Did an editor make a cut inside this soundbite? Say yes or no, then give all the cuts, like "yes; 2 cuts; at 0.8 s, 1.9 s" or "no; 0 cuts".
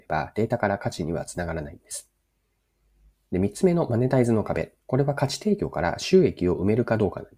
yes; 1 cut; at 4.8 s